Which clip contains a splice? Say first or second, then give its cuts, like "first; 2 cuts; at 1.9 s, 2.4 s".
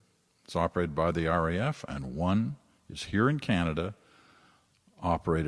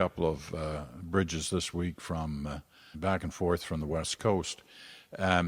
second; 1 cut; at 2.9 s